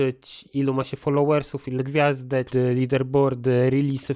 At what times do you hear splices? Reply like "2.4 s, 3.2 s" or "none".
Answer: 2.5 s

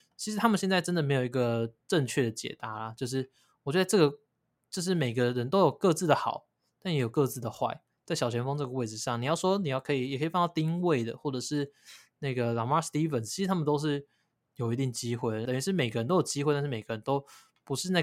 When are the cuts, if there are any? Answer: 15.5 s

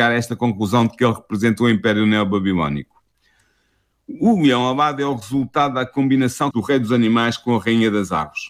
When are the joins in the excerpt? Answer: 6.5 s

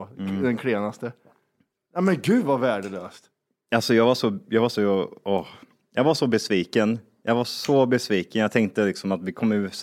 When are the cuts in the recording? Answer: 4.7 s

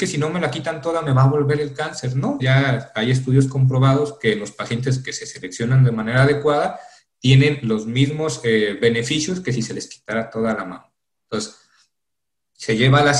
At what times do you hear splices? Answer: 2.4 s

